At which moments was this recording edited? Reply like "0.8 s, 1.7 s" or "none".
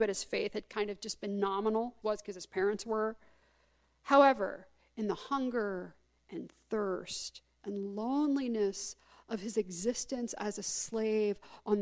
2.0 s